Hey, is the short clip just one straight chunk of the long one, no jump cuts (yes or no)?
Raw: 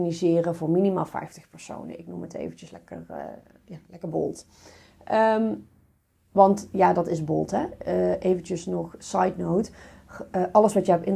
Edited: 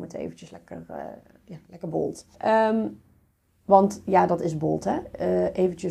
no